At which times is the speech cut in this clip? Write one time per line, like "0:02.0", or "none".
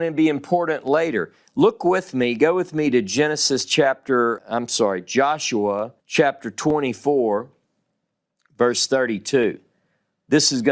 0:04.4
0:06.0